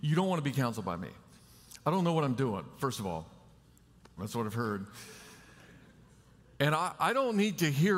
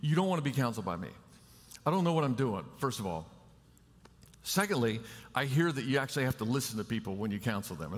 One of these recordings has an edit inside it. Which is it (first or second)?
first